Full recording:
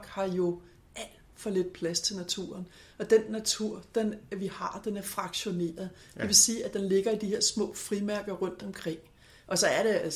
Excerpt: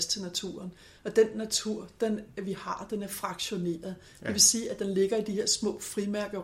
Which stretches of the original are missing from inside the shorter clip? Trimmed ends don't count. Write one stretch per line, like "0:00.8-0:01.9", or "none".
none